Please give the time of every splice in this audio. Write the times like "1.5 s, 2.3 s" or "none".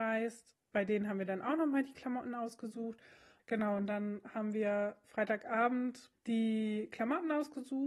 3.4 s, 6.1 s